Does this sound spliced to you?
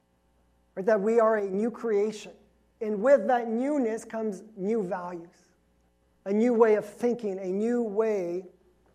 yes; 1 cut; at 2.8 s

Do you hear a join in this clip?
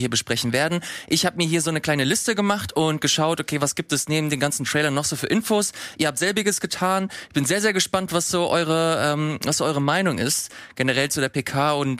no; 0 cuts

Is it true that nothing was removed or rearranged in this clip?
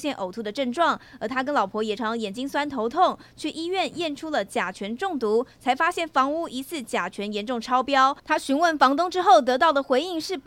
no; 1 cut; at 2.0 s

